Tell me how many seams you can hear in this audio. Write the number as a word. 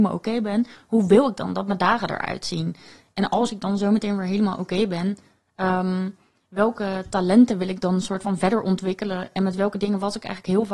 zero